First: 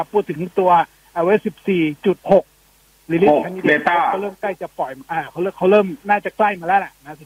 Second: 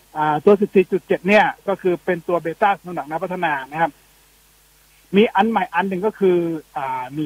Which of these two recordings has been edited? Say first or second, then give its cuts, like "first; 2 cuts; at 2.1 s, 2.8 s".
first; 2 cuts; at 2.2 s, 6.0 s